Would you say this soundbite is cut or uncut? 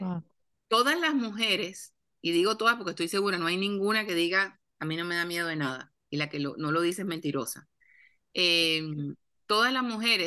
uncut